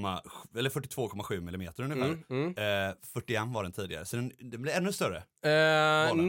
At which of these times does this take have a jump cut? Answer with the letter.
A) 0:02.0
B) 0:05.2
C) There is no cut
C